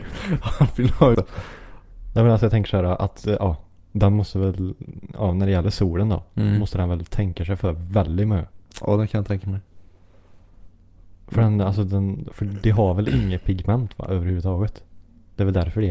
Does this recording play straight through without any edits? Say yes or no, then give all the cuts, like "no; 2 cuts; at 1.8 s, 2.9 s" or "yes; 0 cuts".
no; 1 cut; at 1.1 s